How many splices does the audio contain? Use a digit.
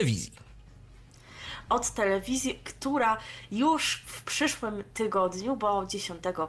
1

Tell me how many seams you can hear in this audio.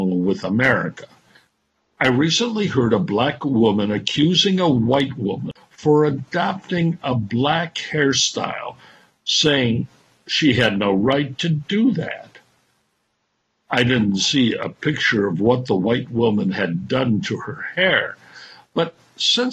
0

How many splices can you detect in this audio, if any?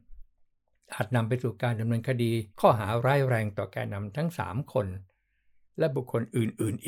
1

